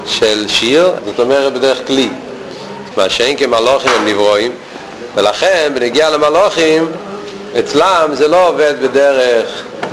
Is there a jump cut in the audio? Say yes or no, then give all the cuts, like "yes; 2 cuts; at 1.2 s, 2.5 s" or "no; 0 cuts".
yes; 2 cuts; at 1.0 s, 2.9 s